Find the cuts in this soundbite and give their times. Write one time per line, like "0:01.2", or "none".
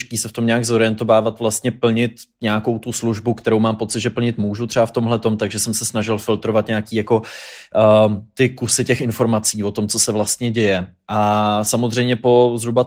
none